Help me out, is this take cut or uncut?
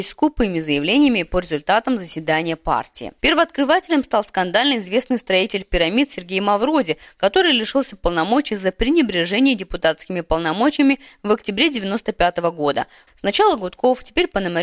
cut